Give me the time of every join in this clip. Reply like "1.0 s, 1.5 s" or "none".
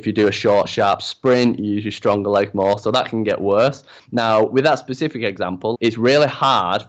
5.7 s